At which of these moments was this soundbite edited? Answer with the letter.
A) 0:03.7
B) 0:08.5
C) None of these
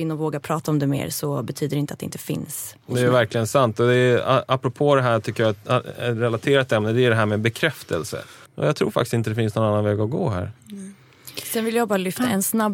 B